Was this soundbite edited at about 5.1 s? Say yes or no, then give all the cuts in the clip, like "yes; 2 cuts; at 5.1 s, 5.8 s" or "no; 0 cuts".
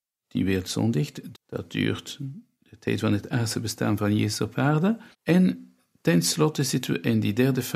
yes; 2 cuts; at 1.3 s, 5.1 s